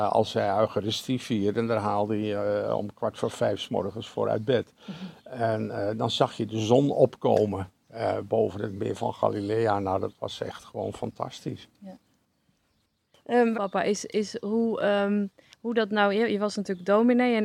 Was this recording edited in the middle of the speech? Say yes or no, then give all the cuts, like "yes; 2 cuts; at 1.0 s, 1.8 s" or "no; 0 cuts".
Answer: yes; 1 cut; at 13.5 s